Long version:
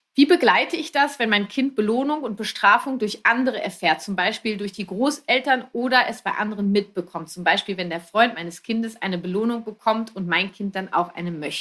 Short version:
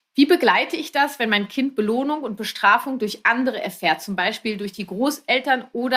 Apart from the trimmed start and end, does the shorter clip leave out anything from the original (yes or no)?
no